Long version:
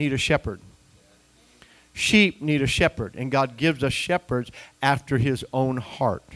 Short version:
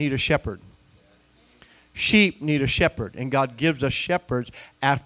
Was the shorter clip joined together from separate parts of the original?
no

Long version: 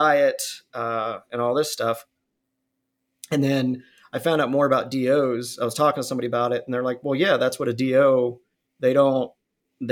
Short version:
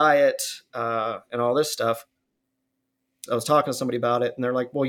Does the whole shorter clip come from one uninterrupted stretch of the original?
no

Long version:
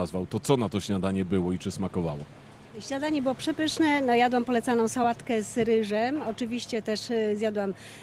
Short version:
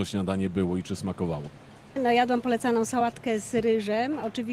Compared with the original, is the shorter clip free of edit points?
no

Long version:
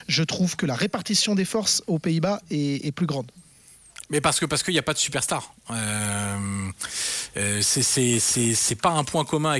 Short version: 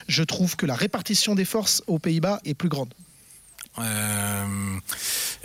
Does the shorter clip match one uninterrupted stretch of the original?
no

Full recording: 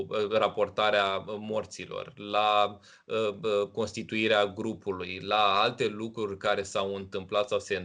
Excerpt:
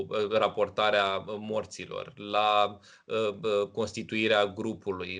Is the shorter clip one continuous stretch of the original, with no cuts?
yes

